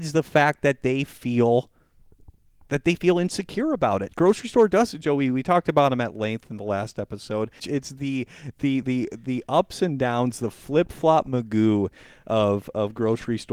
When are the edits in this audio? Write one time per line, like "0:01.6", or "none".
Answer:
0:05.0
0:07.6
0:08.8